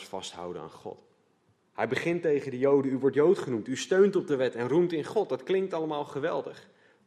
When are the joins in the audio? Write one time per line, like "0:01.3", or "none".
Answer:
0:01.6